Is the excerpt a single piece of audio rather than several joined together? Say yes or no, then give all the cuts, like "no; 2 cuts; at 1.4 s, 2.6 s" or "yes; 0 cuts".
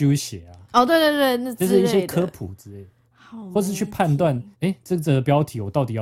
no; 2 cuts; at 3.1 s, 4.5 s